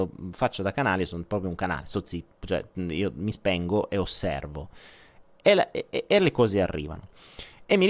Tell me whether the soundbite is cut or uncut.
uncut